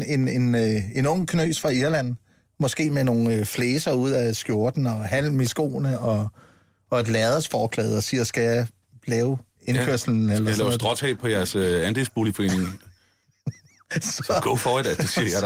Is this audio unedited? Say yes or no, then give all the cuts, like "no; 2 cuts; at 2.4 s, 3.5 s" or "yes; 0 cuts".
yes; 0 cuts